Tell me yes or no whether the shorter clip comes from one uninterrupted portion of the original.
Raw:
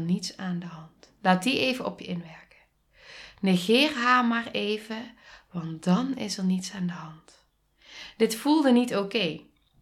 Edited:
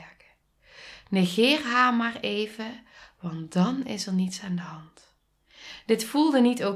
yes